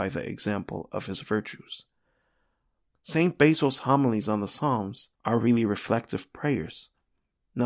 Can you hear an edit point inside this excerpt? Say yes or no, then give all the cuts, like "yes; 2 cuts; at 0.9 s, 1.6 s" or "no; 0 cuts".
yes; 2 cuts; at 2.9 s, 5.1 s